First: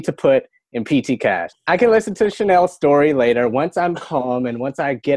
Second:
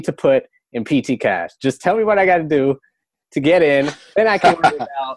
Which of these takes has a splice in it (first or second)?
first